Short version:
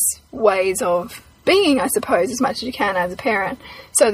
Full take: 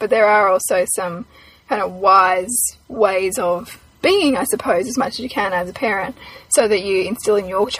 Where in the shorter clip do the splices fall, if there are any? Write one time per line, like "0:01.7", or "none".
none